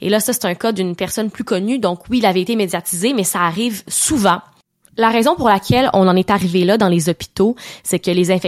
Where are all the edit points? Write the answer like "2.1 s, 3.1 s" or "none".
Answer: none

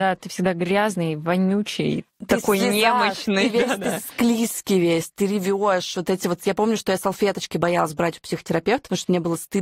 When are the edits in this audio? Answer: none

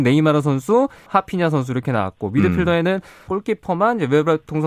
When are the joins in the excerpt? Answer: 1.1 s, 3.3 s

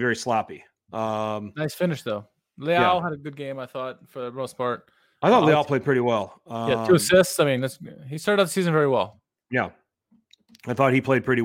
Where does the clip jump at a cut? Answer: none

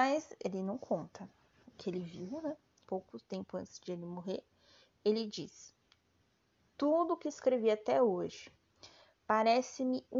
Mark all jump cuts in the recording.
2.8 s

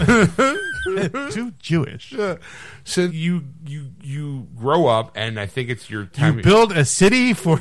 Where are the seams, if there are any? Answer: 3.1 s

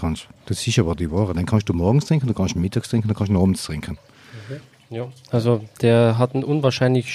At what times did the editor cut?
1.3 s

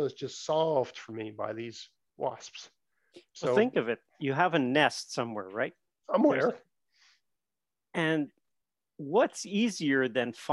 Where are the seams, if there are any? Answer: none

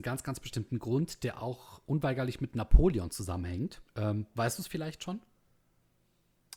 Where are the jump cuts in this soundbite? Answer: 3.9 s

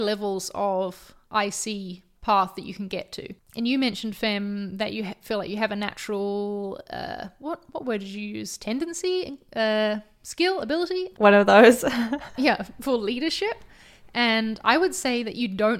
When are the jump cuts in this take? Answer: none

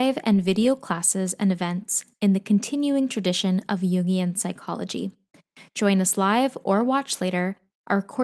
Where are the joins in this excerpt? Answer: none

